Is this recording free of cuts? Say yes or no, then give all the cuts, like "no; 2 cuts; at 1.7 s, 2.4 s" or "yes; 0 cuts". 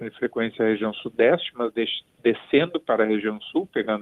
yes; 0 cuts